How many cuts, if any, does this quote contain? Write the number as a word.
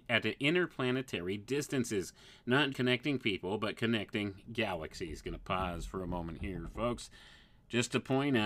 one